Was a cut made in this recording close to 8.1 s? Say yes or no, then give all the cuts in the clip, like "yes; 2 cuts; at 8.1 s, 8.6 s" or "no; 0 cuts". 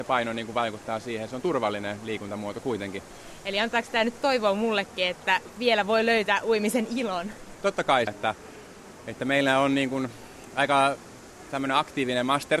yes; 1 cut; at 8.1 s